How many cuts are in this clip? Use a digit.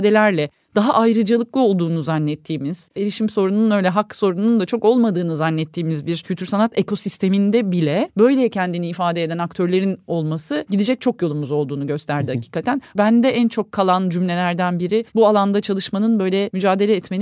2